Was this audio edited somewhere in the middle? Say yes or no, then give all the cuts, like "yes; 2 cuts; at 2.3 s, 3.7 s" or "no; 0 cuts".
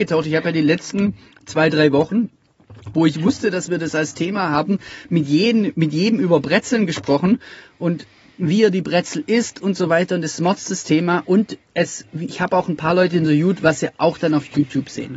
no; 0 cuts